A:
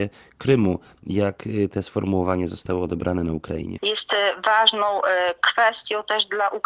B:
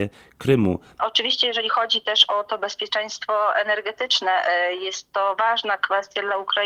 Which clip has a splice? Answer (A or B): B